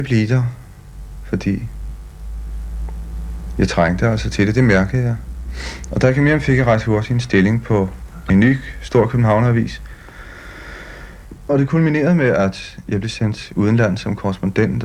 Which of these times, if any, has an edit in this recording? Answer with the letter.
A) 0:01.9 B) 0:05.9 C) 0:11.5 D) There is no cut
C